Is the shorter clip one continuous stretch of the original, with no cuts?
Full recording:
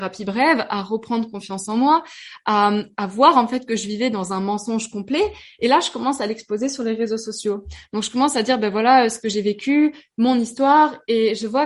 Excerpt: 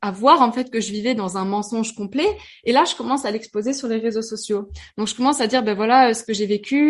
yes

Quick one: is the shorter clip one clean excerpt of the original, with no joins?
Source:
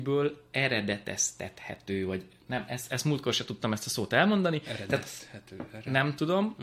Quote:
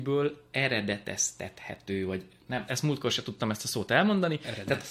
no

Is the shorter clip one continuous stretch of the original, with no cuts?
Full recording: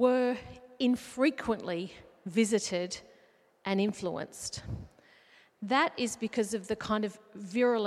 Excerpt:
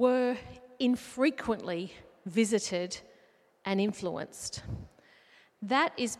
yes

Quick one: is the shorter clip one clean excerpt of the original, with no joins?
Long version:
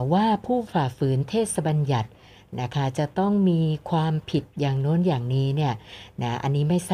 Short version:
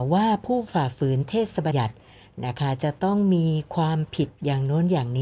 no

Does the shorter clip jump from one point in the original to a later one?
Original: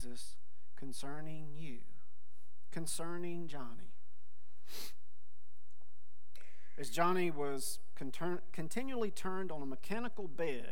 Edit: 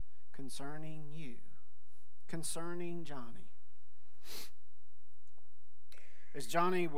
no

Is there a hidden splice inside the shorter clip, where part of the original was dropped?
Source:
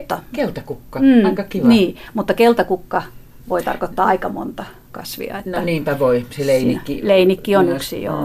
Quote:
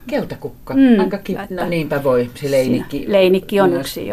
yes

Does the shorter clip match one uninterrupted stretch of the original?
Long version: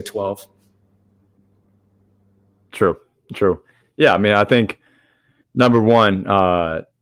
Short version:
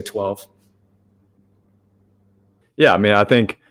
no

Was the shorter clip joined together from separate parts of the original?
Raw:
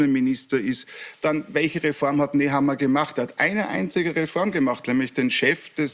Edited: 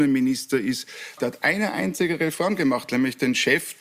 yes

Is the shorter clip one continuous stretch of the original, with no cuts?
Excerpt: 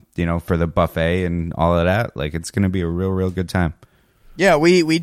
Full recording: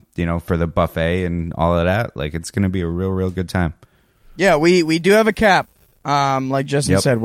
yes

